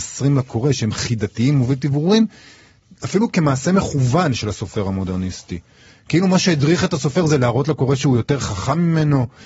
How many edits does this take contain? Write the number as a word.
zero